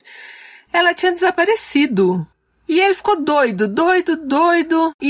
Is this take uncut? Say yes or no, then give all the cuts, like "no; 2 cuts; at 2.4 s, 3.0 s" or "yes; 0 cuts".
yes; 0 cuts